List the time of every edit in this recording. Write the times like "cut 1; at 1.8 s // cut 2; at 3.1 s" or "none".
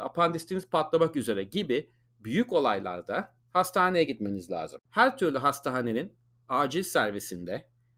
cut 1; at 4.9 s